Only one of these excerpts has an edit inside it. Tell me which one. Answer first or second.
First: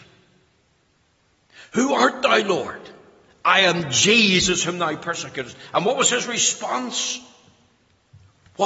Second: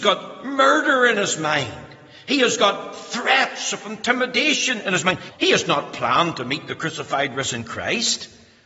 second